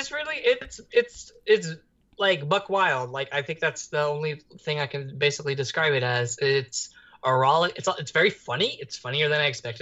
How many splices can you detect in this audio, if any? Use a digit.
0